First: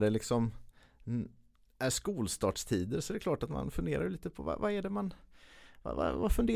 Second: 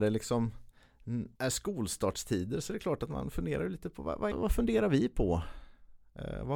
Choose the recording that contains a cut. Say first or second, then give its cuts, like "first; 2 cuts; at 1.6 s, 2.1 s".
second; 2 cuts; at 1.3 s, 4.3 s